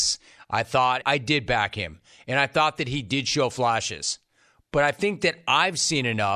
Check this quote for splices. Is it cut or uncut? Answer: cut